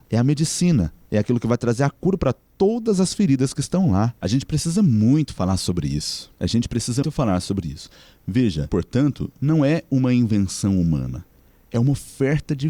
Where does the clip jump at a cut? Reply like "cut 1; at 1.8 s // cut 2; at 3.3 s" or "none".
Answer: cut 1; at 7.0 s // cut 2; at 8.7 s